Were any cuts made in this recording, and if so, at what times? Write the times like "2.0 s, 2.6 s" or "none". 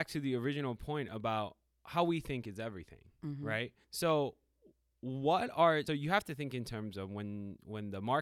3.8 s, 5.9 s